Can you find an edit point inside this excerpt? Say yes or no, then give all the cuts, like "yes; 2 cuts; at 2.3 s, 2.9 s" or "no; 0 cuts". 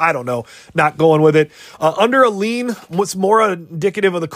no; 0 cuts